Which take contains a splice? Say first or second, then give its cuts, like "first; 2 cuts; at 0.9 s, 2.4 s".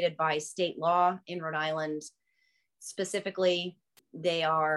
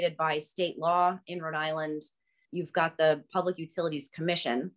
second; 1 cut; at 2.5 s